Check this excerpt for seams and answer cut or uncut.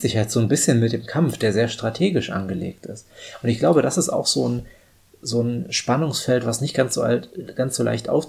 uncut